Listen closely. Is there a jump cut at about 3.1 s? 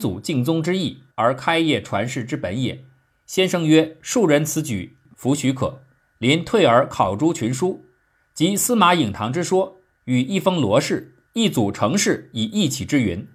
yes; 3 cuts; at 1.1 s, 3.1 s, 5.1 s

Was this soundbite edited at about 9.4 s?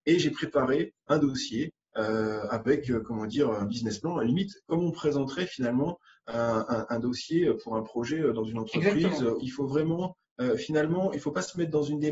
yes; 1 cut; at 9.4 s

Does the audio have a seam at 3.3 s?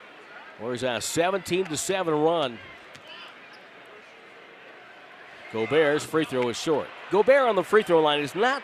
no; 0 cuts

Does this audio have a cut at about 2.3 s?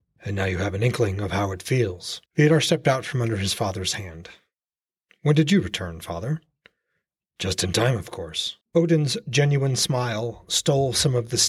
yes; 2 cuts; at 2.3 s, 8.6 s

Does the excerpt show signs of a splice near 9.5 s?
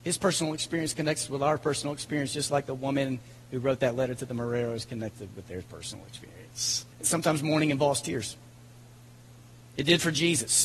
no; 1 cut; at 6.9 s

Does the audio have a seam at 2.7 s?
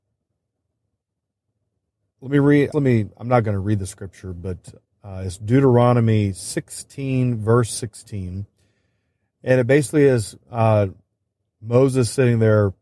yes; 1 cut; at 2.7 s

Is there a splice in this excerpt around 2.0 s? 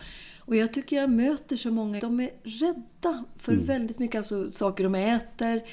yes; 1 cut; at 2.0 s

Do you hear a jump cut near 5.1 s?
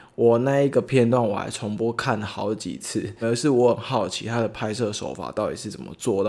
no; 1 cut; at 3.2 s

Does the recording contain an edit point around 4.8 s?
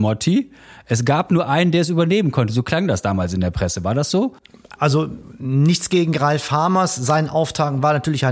yes; 1 cut; at 4.8 s

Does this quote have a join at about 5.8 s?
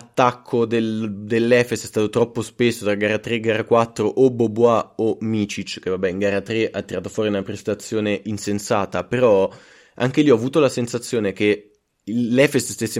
no; 0 cuts

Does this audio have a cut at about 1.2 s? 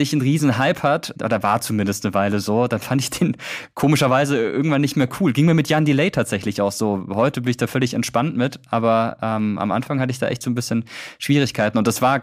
yes; 1 cut; at 1.2 s

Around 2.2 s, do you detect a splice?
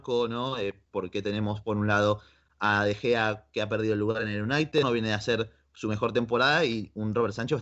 no; 1 cut; at 4.8 s

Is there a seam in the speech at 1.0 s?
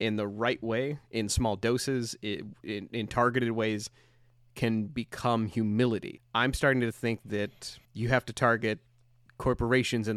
no; 2 cuts; at 6.2 s, 7.8 s

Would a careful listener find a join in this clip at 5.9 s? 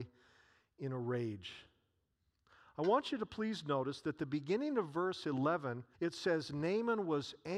yes; 1 cut; at 5.9 s

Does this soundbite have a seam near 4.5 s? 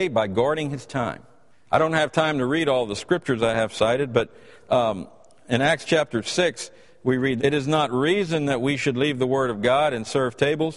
no; 2 cuts; at 1.5 s, 7.4 s

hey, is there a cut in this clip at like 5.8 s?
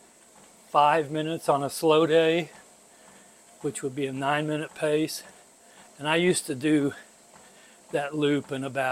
yes; 1 cut; at 5.8 s

